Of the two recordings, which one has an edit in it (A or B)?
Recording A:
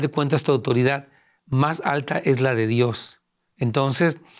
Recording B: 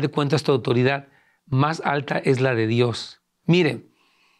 B